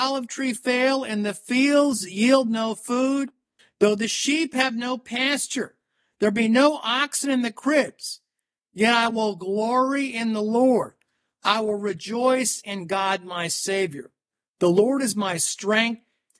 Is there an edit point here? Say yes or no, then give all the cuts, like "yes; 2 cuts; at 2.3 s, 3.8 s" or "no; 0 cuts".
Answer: no; 0 cuts